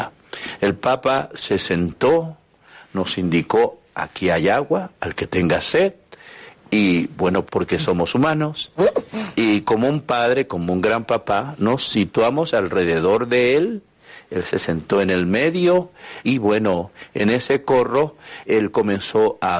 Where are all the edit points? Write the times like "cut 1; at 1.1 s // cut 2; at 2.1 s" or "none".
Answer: cut 1; at 7.5 s // cut 2; at 16.2 s // cut 3; at 18.4 s